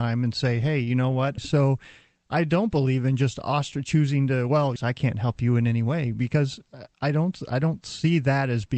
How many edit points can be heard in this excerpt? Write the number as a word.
two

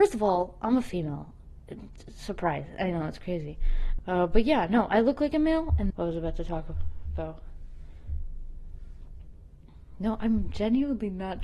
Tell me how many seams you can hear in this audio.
two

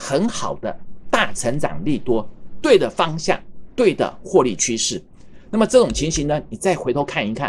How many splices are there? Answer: zero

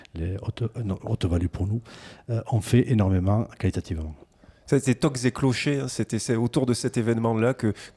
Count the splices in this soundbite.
zero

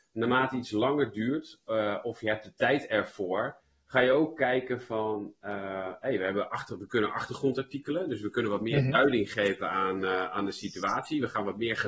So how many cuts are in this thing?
zero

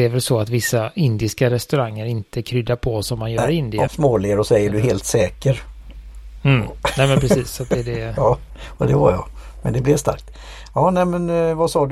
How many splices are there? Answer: one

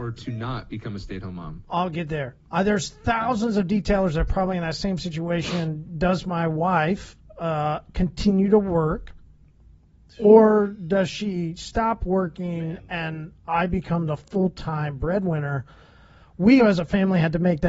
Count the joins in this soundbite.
two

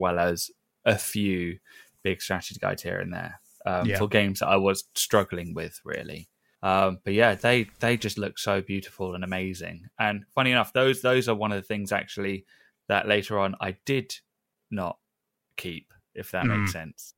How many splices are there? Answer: zero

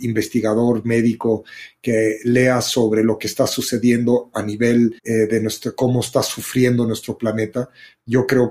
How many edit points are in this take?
one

